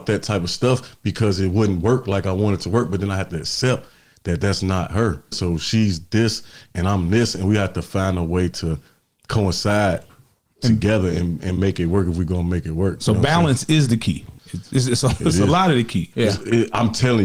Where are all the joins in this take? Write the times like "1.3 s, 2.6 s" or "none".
5.3 s, 14.4 s, 16.1 s

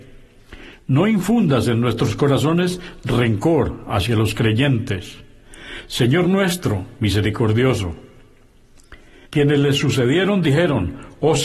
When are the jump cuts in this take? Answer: 7.0 s, 9.3 s

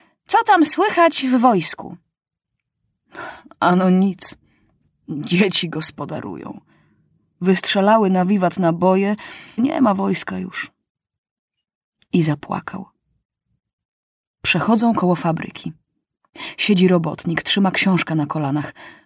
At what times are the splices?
9.6 s

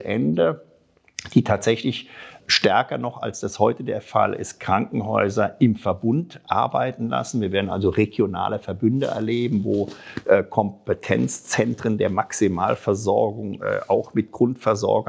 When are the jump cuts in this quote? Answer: 2.4 s

